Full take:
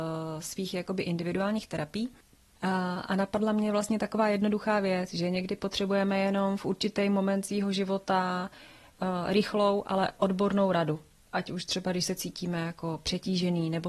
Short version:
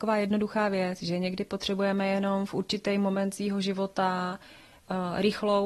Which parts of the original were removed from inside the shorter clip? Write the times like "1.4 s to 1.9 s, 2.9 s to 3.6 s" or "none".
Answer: none